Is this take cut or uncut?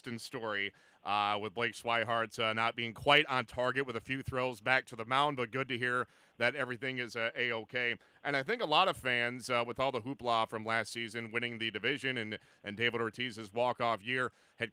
uncut